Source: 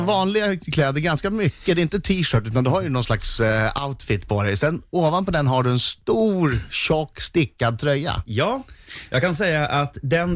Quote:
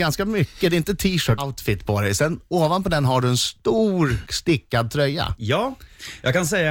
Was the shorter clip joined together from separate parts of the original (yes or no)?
yes